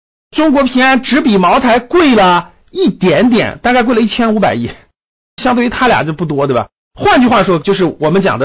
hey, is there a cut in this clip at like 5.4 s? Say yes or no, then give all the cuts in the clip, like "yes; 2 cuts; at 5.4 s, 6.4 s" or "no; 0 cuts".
yes; 2 cuts; at 5.4 s, 6.8 s